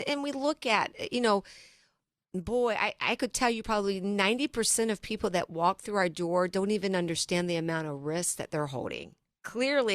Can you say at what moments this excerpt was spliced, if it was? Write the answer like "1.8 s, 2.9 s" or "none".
none